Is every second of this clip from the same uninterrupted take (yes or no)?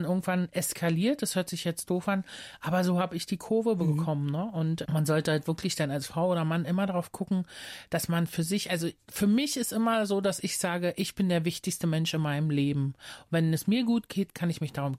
yes